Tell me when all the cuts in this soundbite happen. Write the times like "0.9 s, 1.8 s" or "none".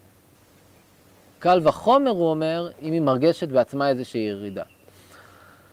2.7 s